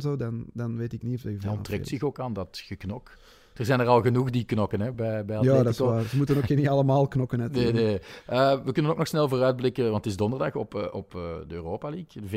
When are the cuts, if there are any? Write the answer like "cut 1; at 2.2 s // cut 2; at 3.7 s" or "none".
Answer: none